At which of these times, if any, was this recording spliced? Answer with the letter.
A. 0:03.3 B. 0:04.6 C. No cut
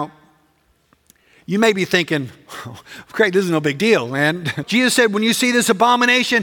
B